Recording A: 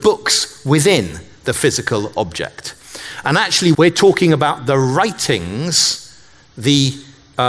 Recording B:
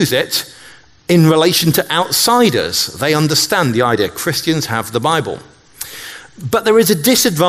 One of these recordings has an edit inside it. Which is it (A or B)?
A